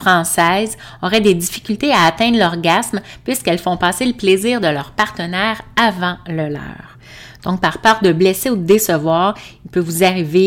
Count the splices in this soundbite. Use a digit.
0